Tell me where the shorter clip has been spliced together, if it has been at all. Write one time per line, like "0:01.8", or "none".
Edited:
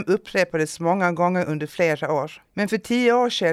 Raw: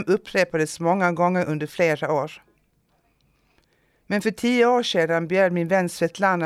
0:02.5

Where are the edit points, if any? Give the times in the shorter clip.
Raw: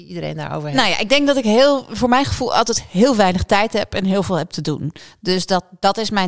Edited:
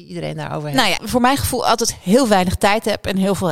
0:01.0

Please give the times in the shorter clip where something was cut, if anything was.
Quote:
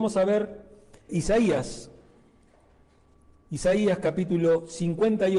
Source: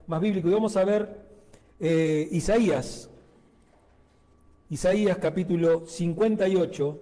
0:01.1

